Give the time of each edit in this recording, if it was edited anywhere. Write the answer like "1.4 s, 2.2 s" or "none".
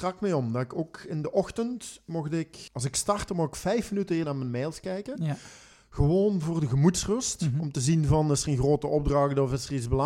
2.7 s, 4.2 s